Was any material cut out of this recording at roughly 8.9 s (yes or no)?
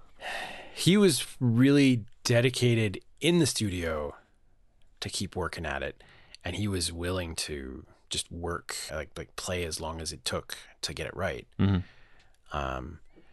yes